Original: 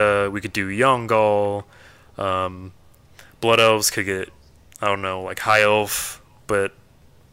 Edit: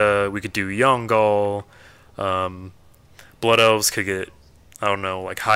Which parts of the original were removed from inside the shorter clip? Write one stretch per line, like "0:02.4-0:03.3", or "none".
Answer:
none